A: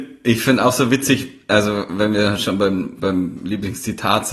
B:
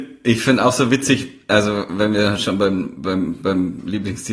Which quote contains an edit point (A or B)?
A